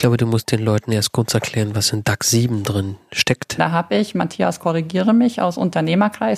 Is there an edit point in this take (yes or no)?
yes